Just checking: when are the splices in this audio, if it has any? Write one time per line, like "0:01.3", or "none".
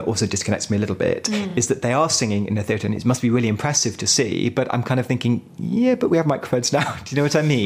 none